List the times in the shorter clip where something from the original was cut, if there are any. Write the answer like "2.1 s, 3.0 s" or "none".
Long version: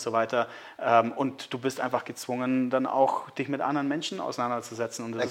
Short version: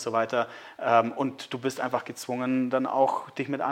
none